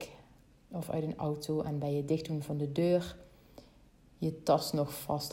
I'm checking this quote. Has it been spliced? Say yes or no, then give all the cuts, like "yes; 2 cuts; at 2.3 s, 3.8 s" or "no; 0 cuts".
no; 0 cuts